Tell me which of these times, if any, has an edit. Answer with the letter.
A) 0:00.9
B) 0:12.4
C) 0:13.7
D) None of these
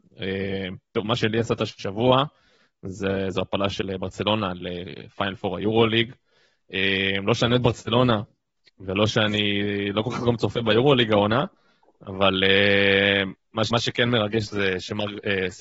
C